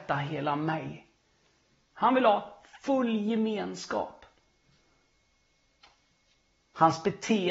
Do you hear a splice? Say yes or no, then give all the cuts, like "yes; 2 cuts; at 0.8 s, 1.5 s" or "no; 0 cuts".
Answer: yes; 1 cut; at 1.9 s